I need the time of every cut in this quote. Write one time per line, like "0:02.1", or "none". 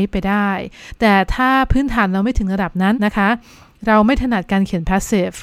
0:02.9